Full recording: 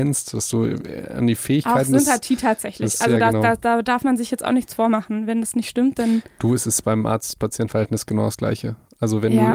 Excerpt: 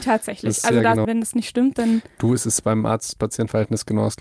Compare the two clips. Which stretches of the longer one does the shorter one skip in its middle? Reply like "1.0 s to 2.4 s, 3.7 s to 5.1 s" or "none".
3.4 s to 5.3 s